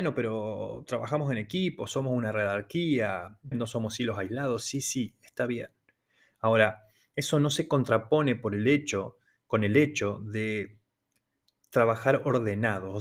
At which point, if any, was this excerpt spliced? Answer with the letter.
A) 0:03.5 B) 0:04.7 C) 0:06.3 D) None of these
A